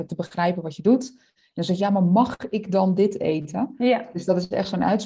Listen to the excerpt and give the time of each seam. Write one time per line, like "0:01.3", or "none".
none